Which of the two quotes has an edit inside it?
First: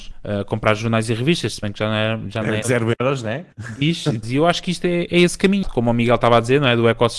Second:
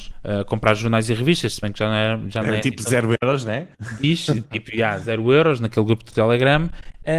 first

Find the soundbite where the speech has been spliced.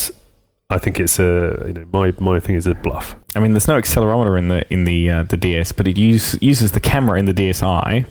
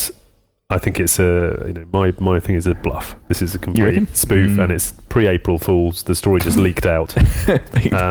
first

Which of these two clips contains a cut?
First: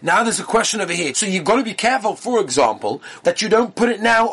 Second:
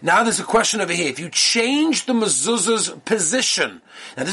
first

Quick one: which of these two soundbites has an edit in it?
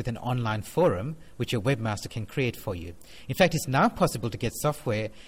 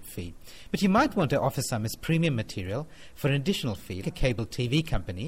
second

